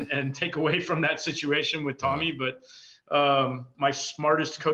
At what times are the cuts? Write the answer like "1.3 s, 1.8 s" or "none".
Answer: 3.7 s